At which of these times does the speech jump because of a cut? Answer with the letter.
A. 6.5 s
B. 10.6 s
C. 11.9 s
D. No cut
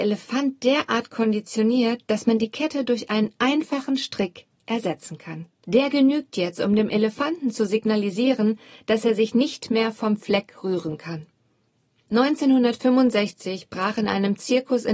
D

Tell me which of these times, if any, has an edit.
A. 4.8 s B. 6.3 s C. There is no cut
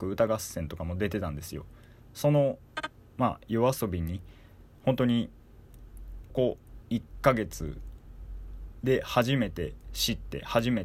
B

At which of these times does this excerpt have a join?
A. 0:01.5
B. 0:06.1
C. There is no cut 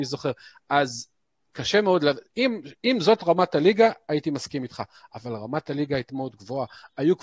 B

